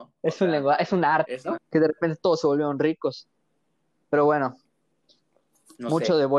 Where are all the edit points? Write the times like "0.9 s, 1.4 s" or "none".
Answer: 1.6 s